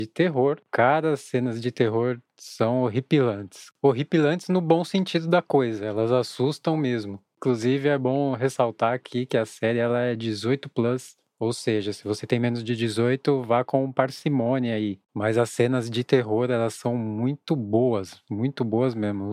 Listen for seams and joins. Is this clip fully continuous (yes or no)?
yes